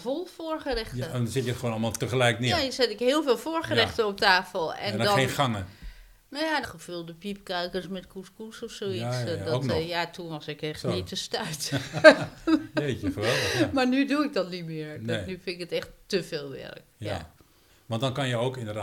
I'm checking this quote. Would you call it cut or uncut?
cut